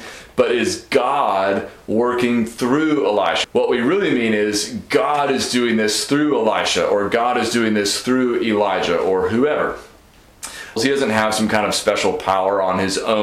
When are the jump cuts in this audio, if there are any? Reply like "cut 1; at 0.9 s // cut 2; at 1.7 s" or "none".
cut 1; at 3.4 s // cut 2; at 10.8 s